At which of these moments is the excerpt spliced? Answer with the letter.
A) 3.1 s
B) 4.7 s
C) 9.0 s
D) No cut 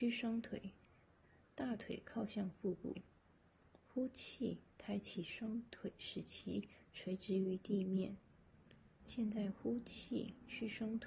C